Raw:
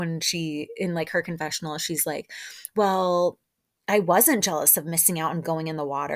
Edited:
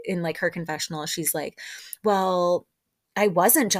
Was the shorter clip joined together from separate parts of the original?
no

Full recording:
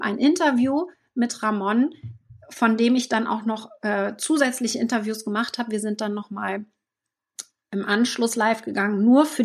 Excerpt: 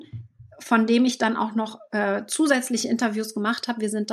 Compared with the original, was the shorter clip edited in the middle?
no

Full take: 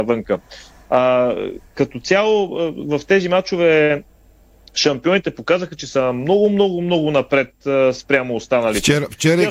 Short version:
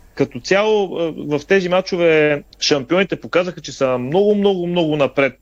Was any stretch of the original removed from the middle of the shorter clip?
yes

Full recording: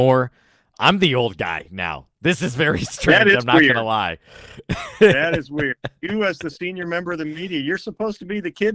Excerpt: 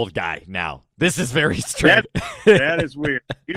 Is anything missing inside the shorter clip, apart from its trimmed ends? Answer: yes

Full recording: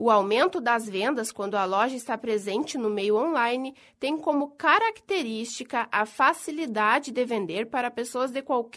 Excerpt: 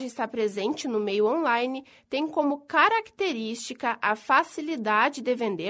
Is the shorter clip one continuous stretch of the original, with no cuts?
yes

